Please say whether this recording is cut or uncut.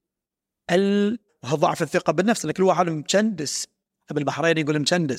cut